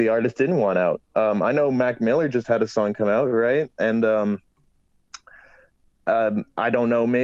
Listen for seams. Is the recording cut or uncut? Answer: uncut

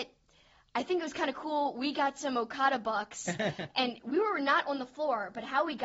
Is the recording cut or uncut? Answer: uncut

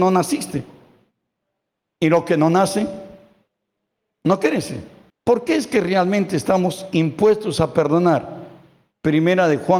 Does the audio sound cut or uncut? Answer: cut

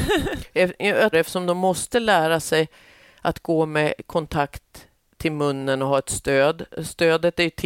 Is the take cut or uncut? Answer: cut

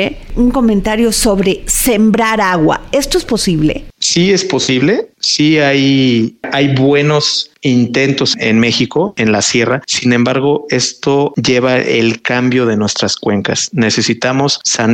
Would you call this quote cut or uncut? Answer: uncut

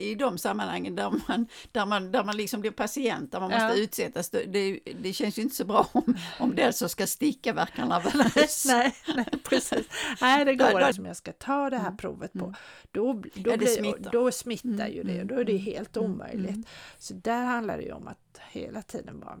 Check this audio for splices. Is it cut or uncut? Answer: cut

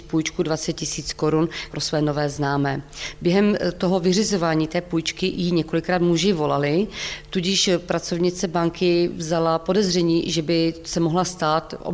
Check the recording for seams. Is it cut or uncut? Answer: uncut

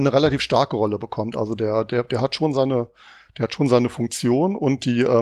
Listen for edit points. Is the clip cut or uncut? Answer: uncut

